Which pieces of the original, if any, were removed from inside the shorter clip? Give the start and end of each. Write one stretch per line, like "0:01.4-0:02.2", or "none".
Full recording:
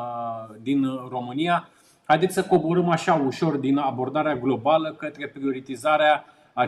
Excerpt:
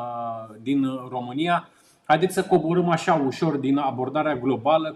none